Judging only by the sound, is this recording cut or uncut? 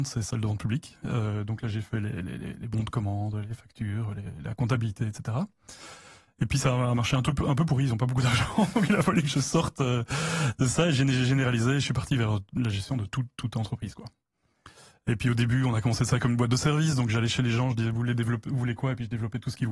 uncut